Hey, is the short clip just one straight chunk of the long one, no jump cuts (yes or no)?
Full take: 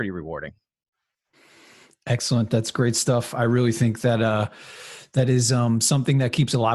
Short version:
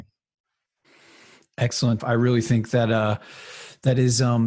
no